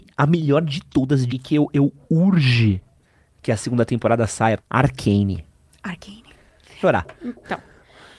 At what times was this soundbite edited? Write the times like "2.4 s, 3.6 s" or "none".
1.3 s, 4.6 s, 6.8 s